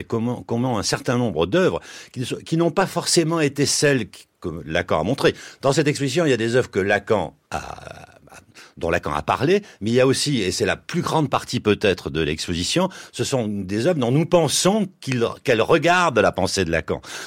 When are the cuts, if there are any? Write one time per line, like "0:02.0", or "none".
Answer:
0:07.4